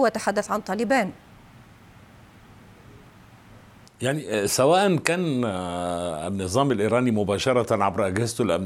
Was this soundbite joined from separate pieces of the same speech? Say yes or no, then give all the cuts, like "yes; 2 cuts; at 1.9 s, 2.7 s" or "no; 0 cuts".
no; 0 cuts